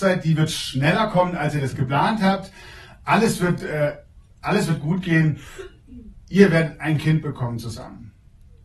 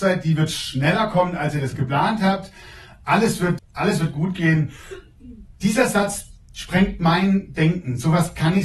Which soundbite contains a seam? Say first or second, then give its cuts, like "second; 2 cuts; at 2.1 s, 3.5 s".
second; 2 cuts; at 3.6 s, 5.5 s